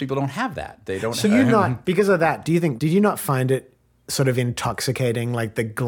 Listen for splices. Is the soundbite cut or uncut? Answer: cut